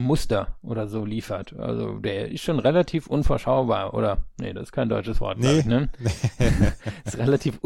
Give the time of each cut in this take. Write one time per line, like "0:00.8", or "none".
none